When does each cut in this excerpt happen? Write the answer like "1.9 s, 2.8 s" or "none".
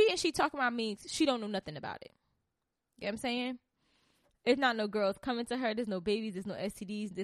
none

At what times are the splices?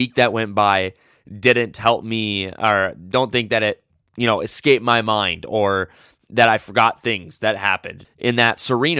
8.0 s

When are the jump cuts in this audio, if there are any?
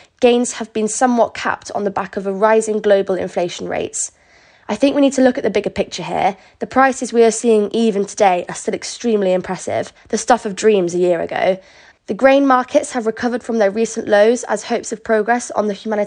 4.6 s, 11.9 s

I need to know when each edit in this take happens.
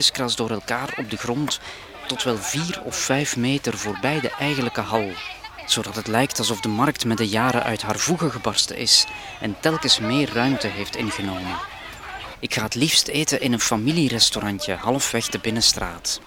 12.3 s

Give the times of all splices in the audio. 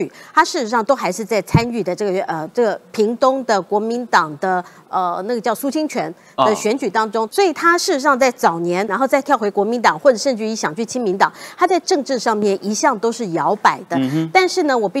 7.3 s, 8.9 s

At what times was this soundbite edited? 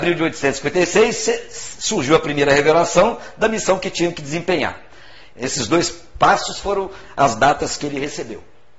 5.3 s

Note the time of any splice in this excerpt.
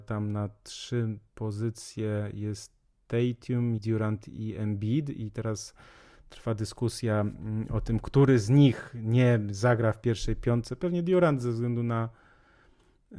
3.8 s

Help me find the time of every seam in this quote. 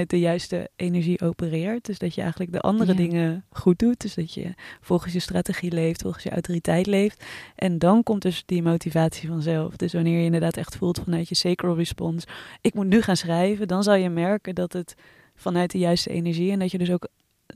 none

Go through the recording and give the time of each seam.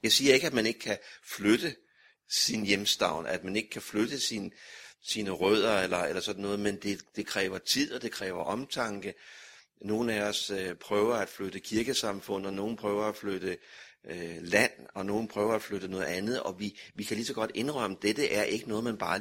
none

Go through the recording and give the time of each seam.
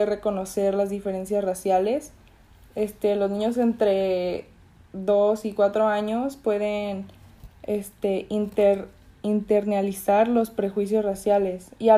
none

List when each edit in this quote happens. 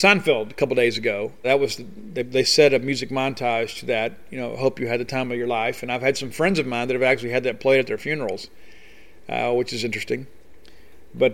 1.4 s

